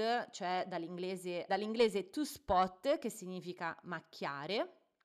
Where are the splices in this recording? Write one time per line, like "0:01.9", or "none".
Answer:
0:01.5